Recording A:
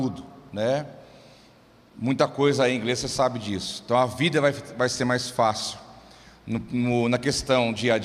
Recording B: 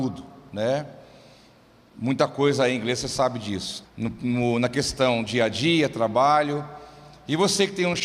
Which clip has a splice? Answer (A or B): B